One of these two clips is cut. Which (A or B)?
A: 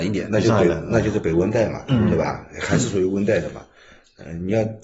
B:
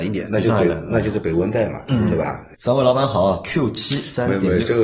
B